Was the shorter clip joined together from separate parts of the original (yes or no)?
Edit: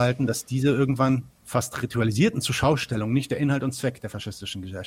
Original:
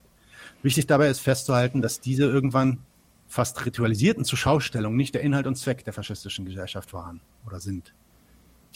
yes